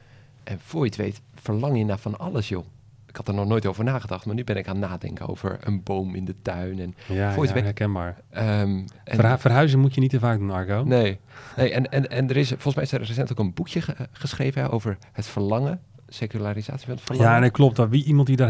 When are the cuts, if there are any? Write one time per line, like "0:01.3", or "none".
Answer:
0:07.6
0:14.7